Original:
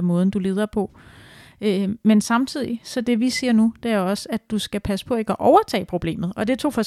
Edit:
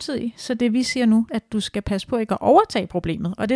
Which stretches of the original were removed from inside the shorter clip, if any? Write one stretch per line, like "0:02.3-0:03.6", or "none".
0:03.8-0:04.3